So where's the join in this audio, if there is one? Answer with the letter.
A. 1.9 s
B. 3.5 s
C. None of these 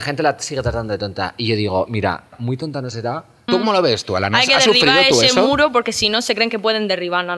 B